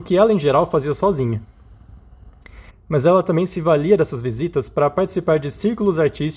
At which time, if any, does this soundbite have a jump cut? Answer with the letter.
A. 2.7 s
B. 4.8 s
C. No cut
A